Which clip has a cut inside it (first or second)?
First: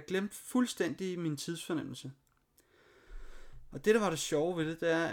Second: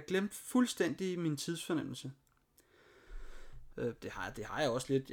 second